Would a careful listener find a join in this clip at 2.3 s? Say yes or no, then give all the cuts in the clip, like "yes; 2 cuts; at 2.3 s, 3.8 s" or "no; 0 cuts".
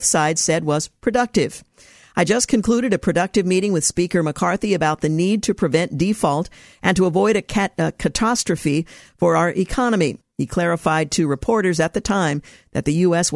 no; 1 cut; at 10.2 s